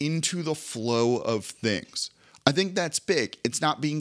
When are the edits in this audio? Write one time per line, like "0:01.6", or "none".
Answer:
none